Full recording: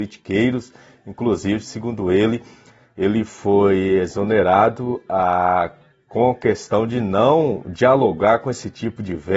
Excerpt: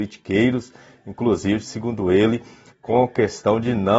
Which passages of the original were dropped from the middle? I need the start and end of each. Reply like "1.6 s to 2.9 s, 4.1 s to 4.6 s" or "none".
2.7 s to 6.0 s